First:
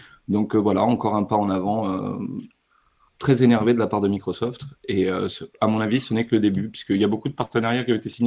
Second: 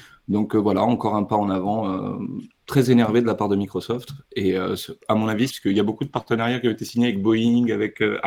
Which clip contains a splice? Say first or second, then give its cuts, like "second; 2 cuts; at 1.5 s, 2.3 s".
second; 2 cuts; at 2.6 s, 5.5 s